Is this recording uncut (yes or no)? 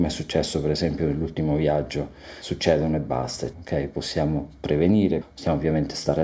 no